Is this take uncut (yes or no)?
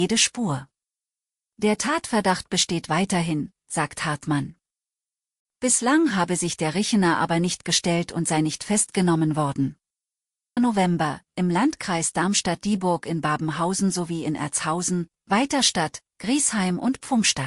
no